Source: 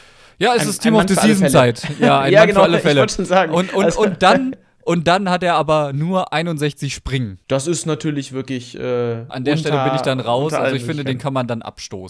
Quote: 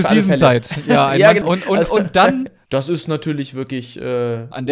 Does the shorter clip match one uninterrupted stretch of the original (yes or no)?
no